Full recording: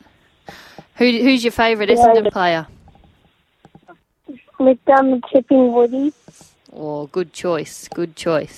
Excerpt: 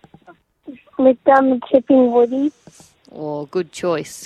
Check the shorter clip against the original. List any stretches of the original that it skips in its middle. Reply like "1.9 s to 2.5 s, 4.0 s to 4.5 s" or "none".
none